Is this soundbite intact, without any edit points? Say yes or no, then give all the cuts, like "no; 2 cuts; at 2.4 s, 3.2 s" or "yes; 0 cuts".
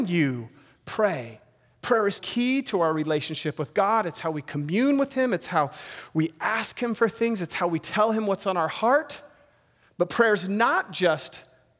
no; 1 cut; at 2.2 s